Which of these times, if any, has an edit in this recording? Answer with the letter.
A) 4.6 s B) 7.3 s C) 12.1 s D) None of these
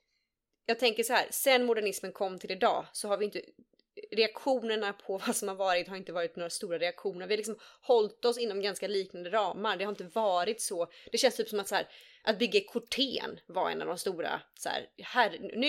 D